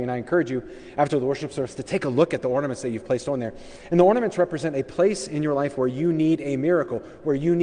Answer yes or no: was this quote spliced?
no